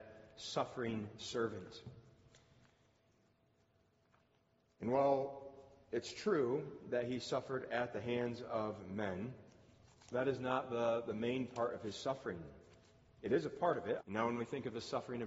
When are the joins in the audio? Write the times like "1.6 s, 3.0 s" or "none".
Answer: 14.0 s